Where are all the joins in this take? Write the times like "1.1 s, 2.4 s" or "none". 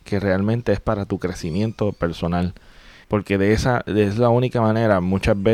3.0 s